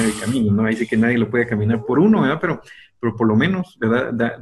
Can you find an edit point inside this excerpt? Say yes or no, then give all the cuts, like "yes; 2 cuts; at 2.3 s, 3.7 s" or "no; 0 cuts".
no; 0 cuts